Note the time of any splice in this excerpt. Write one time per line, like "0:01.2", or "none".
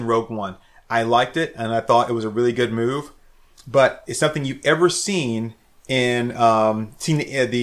none